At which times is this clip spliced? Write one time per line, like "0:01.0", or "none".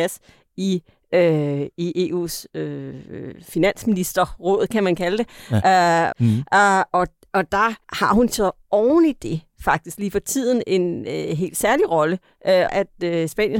0:06.1
0:07.8
0:12.7